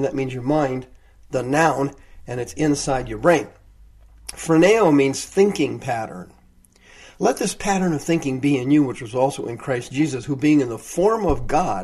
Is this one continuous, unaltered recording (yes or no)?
yes